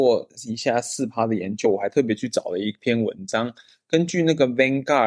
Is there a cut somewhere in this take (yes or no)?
no